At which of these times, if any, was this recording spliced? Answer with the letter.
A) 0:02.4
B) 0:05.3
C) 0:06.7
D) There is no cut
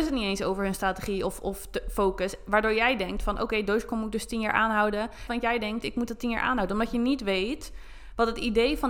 B